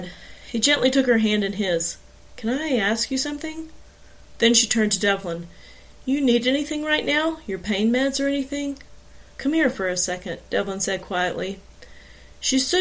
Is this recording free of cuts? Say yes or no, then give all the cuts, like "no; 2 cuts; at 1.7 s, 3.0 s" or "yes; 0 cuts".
no; 2 cuts; at 4.4 s, 9.3 s